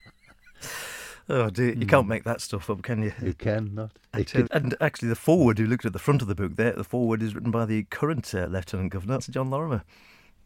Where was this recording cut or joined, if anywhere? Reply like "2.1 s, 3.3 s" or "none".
4.5 s, 9.2 s